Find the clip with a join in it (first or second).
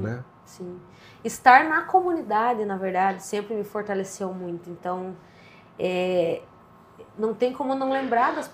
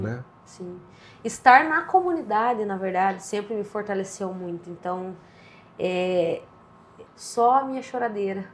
second